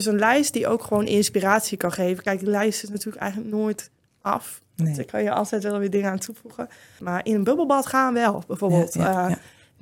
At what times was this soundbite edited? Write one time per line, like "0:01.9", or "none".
0:07.0